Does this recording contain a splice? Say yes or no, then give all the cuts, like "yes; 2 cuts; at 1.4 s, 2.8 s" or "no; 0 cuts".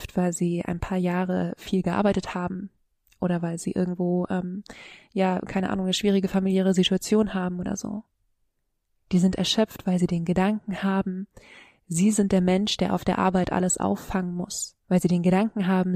yes; 1 cut; at 14.8 s